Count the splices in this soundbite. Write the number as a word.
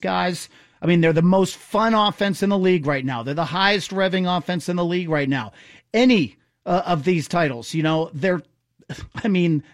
zero